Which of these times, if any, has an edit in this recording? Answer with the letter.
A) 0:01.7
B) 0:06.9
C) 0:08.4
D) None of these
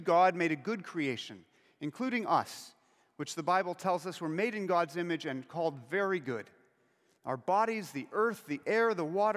D